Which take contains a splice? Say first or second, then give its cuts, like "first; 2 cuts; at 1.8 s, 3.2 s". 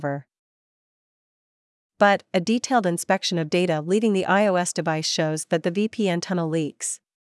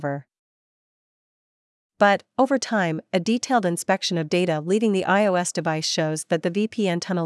first; 1 cut; at 2.3 s